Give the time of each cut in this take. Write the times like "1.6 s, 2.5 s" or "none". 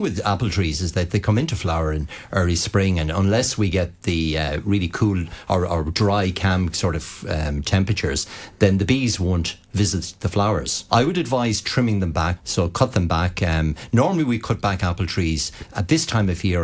10.9 s, 12.4 s

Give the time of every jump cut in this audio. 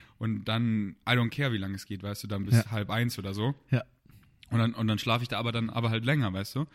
none

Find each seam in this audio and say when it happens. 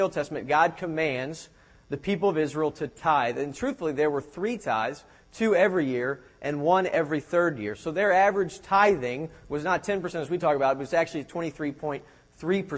none

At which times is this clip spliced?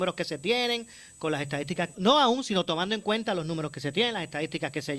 1.9 s

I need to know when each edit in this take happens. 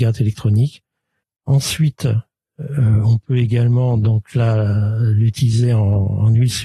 1.2 s

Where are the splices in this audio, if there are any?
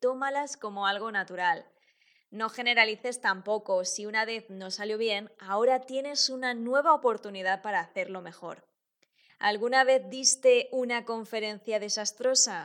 9.3 s

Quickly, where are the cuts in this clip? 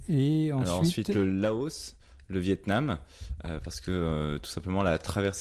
none

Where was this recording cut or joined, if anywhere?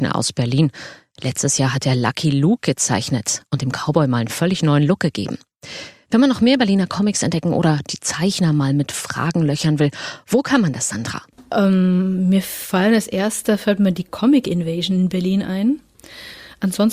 none

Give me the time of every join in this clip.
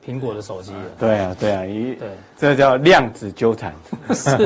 1.0 s, 2.3 s

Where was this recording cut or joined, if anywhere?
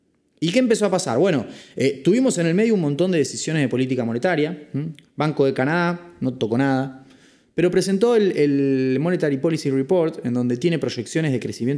none

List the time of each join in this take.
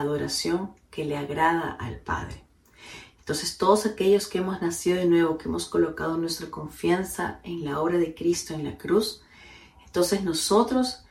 none

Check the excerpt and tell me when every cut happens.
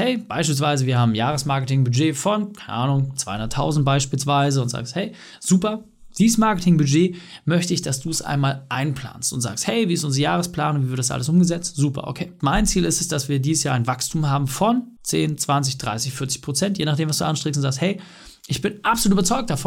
12.4 s

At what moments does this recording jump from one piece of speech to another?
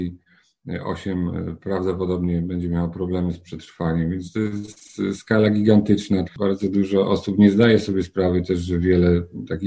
6.3 s

